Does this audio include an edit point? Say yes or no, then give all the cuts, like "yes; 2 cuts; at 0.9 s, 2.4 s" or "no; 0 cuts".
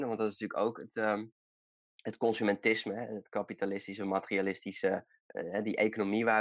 no; 0 cuts